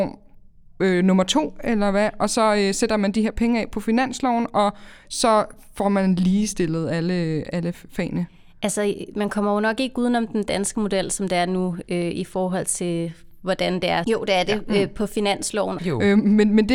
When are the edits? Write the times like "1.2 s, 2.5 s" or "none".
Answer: 14.0 s, 15.8 s